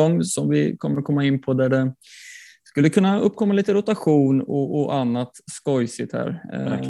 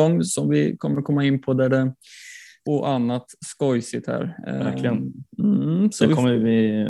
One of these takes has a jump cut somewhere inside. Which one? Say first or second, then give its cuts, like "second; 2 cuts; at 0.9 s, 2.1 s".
second; 1 cut; at 2.7 s